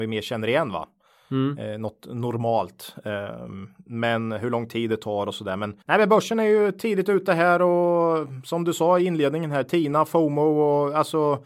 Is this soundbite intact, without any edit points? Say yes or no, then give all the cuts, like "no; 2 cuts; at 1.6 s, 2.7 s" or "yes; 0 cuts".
no; 1 cut; at 5.8 s